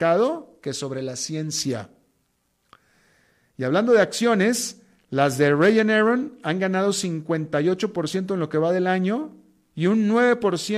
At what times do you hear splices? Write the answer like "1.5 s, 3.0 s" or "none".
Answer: none

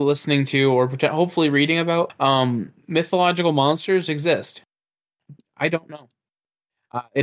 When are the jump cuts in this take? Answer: 2.1 s, 5.4 s

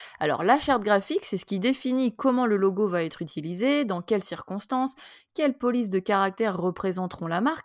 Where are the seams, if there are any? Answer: none

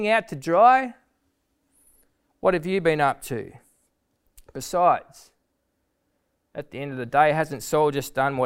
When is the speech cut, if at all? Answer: none

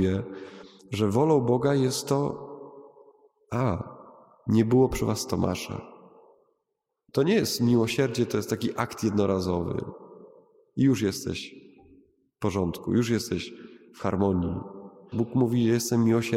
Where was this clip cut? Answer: 7.1 s, 15.1 s

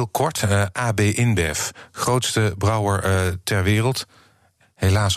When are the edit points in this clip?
none

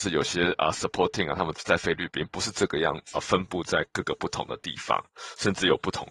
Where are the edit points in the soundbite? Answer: 1.5 s, 3.1 s

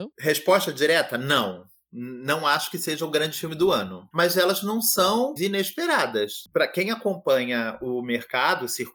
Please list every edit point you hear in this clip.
4.1 s, 5.4 s

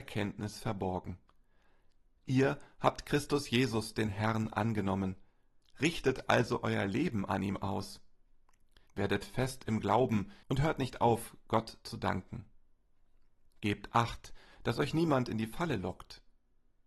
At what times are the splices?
8.9 s, 10.4 s

